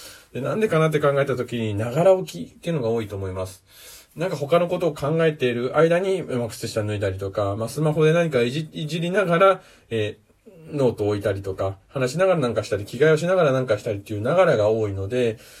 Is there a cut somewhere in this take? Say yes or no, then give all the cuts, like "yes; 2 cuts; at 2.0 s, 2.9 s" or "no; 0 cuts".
no; 0 cuts